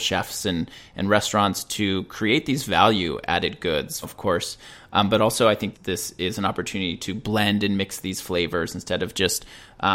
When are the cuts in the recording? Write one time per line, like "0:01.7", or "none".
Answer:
0:04.0
0:05.7